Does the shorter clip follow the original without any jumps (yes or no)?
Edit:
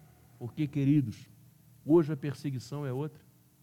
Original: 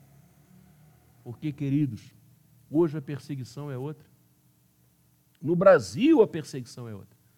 yes